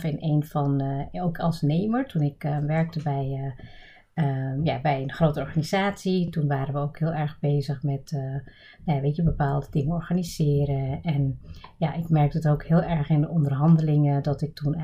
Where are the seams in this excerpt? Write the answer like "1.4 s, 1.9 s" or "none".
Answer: none